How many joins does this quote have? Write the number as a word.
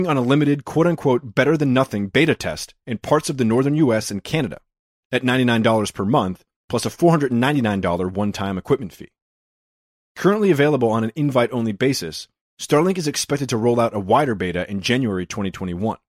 zero